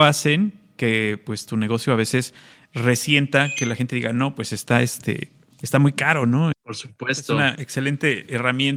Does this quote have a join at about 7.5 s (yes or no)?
yes